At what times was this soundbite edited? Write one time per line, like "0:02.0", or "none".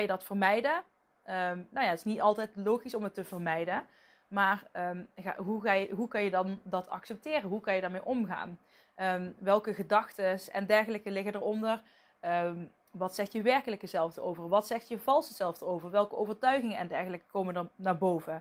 none